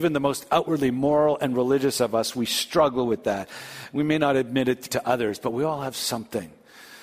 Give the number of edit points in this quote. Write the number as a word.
one